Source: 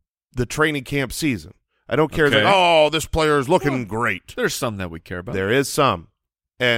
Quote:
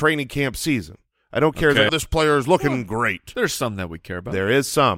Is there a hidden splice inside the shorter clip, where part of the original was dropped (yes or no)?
yes